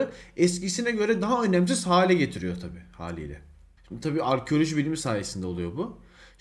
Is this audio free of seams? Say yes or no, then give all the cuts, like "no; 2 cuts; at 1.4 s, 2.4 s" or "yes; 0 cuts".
no; 1 cut; at 3.8 s